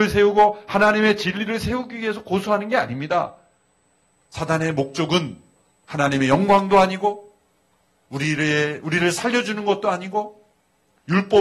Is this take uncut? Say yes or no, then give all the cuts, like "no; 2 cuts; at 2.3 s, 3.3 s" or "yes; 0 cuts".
yes; 0 cuts